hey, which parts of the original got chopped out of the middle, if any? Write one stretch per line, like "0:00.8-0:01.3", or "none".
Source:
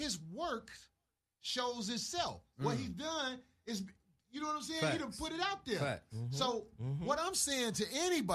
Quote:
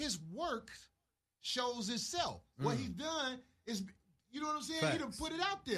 none